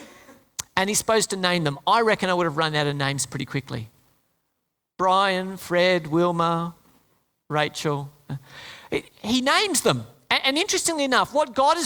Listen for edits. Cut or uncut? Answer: uncut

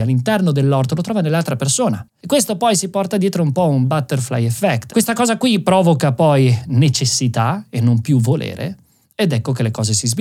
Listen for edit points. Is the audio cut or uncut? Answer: cut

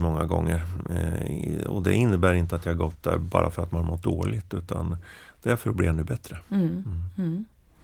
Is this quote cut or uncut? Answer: uncut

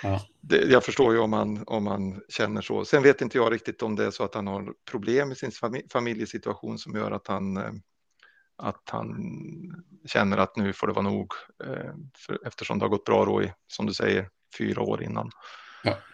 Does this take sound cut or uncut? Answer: uncut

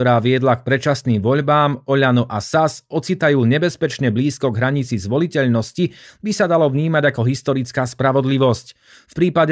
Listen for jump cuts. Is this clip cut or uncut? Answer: uncut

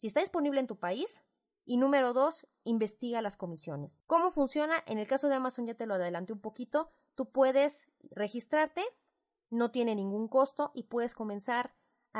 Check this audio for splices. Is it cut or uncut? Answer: uncut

